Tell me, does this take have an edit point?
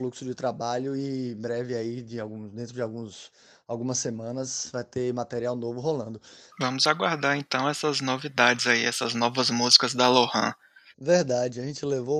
yes; 2 cuts; at 6.5 s, 10.9 s

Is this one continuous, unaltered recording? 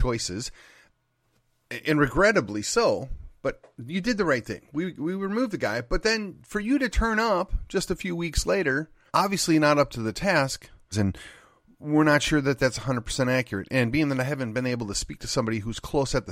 no; 2 cuts; at 9.1 s, 10.9 s

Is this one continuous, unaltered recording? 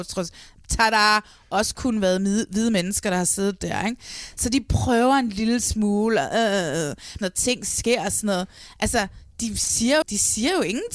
no; 2 cuts; at 7.2 s, 10.0 s

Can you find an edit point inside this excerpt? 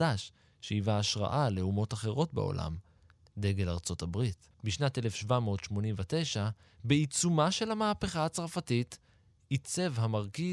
yes; 1 cut; at 4.5 s

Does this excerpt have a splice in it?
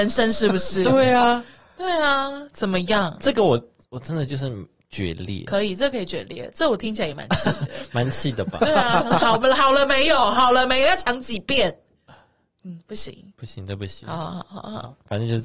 no; 0 cuts

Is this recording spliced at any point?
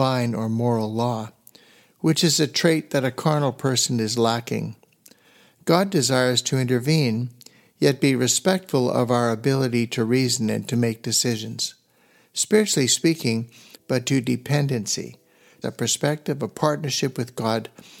yes; 2 cuts; at 13.7 s, 15.6 s

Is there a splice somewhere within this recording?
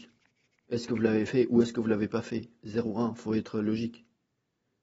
no; 0 cuts

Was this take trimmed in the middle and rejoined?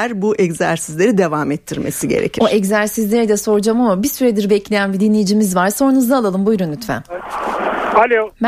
no; 0 cuts

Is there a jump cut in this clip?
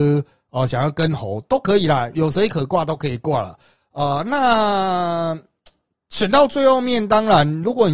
yes; 1 cut; at 2.1 s

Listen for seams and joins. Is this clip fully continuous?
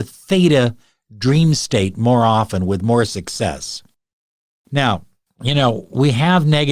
yes; 0 cuts

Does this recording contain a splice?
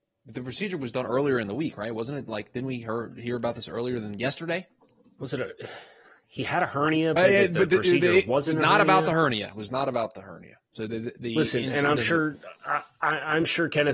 yes; 2 cuts; at 7.2 s, 10.7 s

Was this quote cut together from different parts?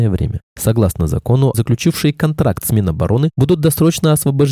yes; 1 cut; at 1.5 s

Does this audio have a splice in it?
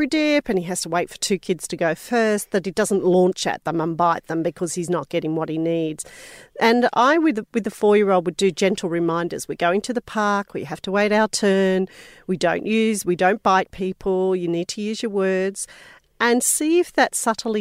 no; 0 cuts

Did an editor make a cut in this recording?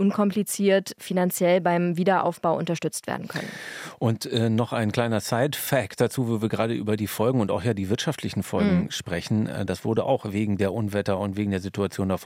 yes; 1 cut; at 9.7 s

